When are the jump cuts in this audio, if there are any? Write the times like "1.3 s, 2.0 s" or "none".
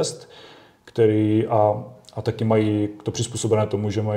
none